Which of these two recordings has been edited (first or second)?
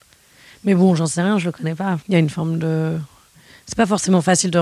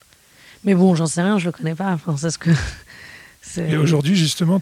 first